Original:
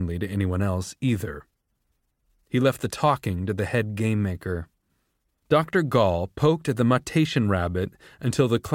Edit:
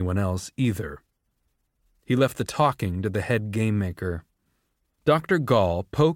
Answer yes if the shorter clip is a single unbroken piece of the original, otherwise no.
yes